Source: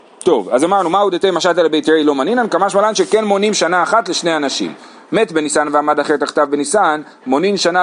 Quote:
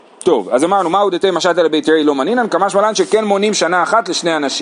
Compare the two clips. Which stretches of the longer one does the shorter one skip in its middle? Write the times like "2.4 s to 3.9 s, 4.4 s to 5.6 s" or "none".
none